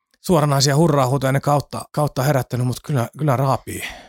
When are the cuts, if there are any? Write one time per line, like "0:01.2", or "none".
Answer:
none